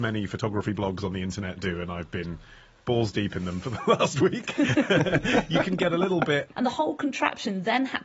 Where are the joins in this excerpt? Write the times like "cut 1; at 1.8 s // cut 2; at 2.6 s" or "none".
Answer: cut 1; at 6.5 s